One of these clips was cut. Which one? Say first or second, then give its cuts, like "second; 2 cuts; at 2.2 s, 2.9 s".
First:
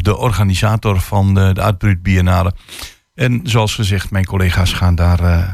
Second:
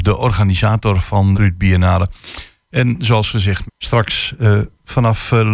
second; 2 cuts; at 1.3 s, 3.7 s